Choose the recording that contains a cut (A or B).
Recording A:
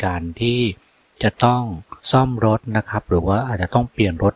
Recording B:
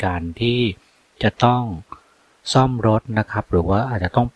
A